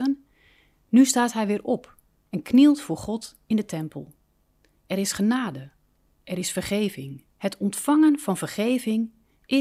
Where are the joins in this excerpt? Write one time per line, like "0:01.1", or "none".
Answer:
0:07.3